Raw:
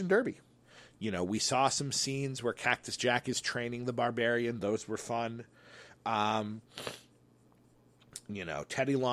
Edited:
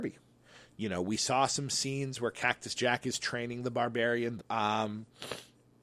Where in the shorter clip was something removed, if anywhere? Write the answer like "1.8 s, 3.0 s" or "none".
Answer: 4.4 s